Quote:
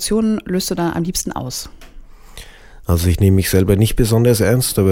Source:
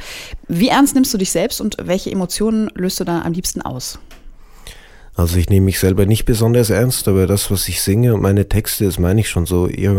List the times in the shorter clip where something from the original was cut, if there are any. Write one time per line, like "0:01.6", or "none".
none